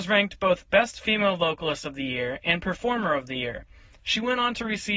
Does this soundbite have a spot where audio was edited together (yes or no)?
no